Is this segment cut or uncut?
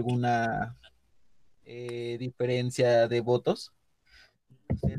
uncut